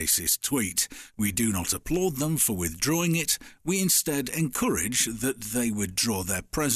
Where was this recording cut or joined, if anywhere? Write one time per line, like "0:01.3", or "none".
none